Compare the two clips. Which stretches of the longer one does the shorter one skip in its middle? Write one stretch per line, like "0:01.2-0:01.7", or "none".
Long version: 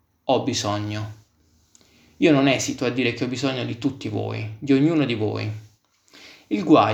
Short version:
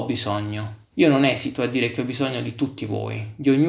0:01.3-0:02.1